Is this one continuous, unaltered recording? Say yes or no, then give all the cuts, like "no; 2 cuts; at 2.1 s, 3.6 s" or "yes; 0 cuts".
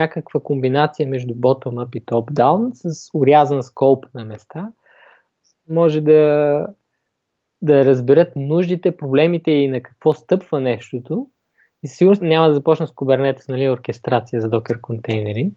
no; 1 cut; at 12.2 s